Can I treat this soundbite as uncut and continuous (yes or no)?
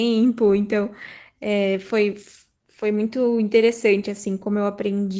yes